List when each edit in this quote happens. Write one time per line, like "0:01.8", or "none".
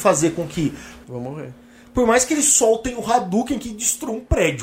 0:01.0